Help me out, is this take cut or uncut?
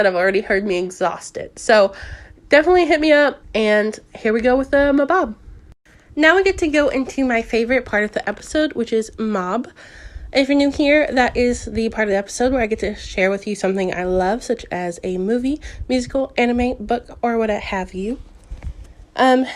cut